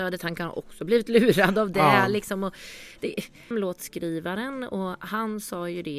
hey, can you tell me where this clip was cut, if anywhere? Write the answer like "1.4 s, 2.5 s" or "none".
3.5 s